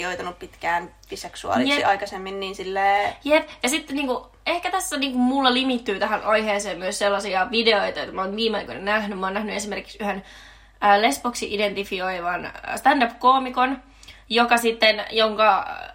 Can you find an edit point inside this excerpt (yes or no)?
no